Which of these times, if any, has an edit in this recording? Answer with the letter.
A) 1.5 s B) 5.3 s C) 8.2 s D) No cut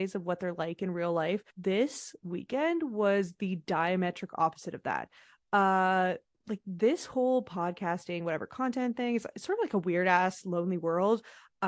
A